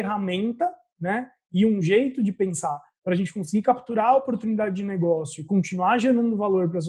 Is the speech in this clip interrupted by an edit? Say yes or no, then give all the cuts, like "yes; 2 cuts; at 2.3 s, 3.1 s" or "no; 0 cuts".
no; 0 cuts